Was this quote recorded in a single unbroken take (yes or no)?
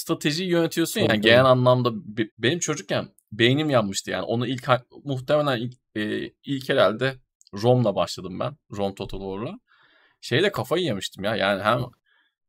no